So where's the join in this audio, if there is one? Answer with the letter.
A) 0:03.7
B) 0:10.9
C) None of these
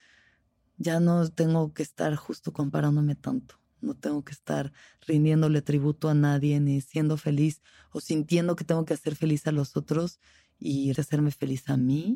B